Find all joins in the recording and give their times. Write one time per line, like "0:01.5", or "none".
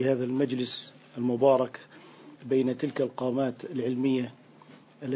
0:02.4